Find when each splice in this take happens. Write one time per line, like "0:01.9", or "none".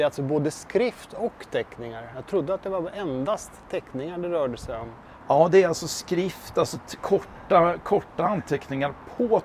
none